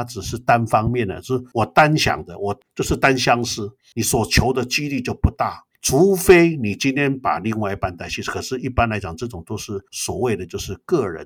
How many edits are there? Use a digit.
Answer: 0